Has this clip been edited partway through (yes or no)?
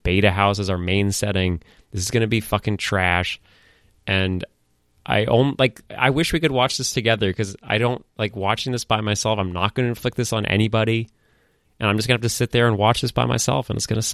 no